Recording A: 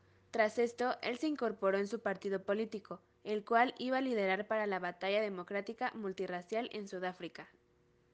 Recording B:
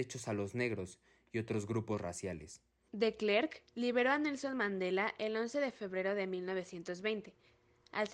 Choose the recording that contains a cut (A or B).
B